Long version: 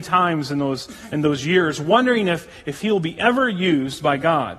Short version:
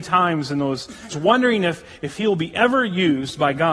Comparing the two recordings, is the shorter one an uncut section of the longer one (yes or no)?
no